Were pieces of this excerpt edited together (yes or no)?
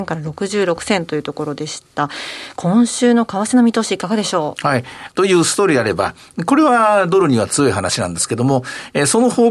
yes